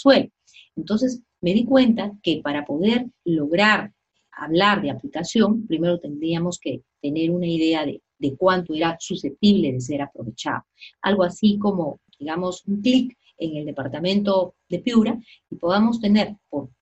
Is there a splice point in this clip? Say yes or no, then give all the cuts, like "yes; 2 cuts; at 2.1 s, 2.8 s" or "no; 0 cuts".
yes; 1 cut; at 10.9 s